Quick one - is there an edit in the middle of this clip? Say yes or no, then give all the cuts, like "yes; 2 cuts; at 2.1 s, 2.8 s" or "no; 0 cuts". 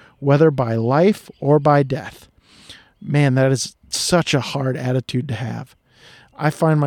no; 0 cuts